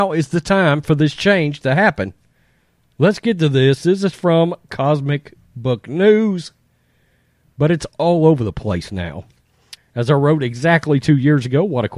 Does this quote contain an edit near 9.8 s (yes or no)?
yes